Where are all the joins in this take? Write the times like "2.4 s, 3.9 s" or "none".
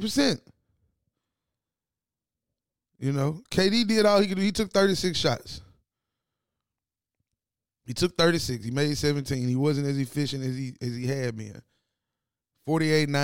none